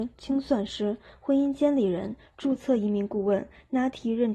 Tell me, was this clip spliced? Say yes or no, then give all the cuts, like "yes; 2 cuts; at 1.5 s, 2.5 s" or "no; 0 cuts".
no; 0 cuts